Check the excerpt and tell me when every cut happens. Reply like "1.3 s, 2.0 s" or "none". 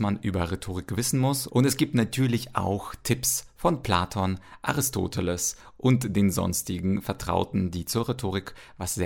1.5 s